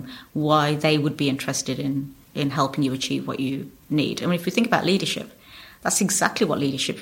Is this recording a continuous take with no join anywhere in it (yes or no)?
yes